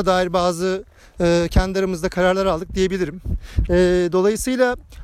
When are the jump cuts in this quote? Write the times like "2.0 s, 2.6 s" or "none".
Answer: 3.7 s